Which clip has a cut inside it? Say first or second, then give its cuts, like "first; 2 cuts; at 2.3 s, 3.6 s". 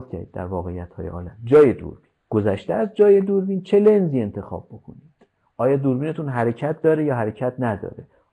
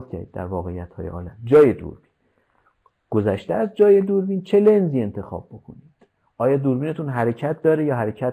first; 1 cut; at 2.2 s